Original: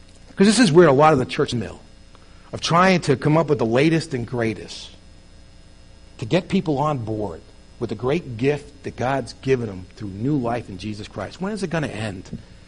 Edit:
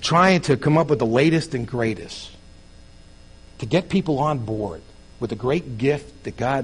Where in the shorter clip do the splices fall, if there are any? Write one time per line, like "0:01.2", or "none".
none